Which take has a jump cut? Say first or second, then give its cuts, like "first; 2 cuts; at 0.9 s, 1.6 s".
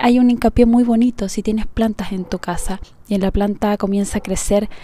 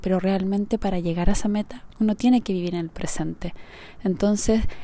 second; 1 cut; at 1.9 s